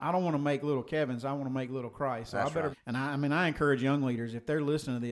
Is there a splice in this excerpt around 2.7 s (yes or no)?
yes